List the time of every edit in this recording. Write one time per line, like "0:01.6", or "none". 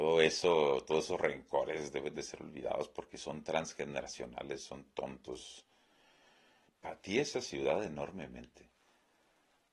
0:06.7